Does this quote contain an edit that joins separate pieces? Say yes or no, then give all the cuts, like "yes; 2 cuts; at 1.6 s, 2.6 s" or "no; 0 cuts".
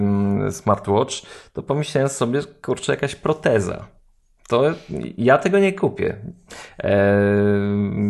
no; 0 cuts